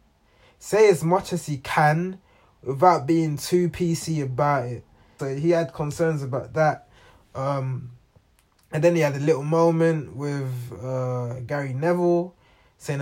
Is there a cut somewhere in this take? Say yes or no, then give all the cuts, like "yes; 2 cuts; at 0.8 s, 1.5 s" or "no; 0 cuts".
yes; 1 cut; at 5.2 s